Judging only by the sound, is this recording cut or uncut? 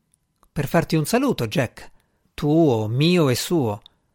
cut